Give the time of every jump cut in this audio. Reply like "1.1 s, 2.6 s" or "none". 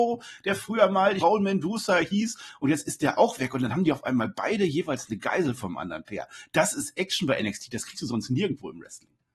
1.2 s